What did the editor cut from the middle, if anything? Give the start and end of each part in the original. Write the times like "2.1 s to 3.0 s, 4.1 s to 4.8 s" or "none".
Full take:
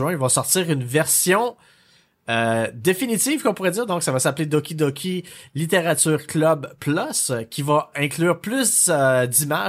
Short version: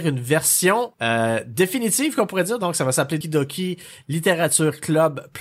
1.6 s to 2.2 s, 4.5 s to 4.7 s